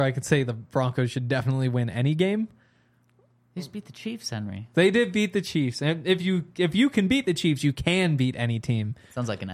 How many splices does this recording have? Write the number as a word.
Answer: one